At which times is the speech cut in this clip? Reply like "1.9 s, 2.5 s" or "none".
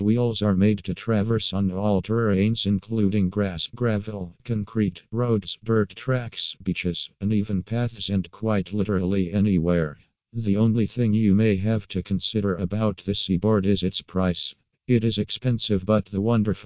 none